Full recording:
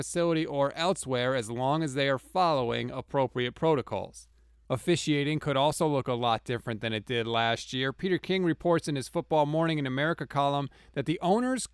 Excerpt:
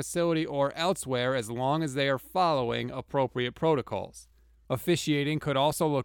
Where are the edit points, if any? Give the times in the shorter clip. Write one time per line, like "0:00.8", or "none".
none